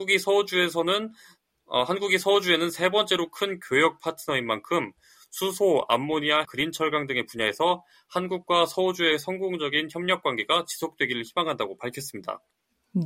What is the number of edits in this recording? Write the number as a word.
one